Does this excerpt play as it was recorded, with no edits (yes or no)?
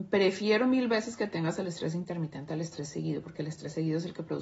yes